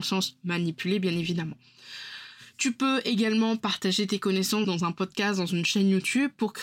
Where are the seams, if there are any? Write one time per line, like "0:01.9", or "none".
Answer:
0:04.6